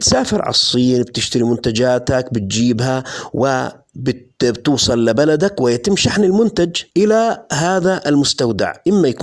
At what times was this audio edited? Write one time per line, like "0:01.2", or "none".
0:06.9